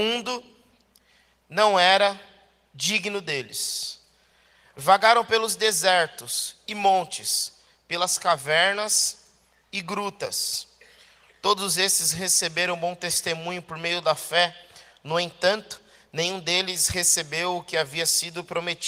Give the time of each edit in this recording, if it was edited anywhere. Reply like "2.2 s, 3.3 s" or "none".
none